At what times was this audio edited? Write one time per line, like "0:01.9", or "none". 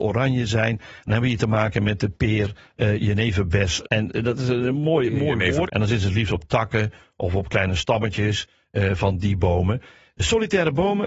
0:03.8
0:05.7